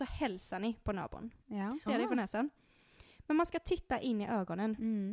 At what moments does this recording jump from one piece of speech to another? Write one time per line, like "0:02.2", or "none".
0:01.9